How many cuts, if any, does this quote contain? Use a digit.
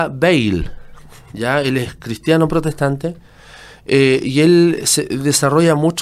0